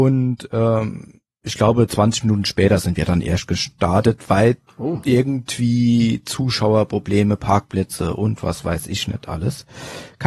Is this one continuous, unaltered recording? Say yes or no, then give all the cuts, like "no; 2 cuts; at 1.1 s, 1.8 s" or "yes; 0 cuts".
yes; 0 cuts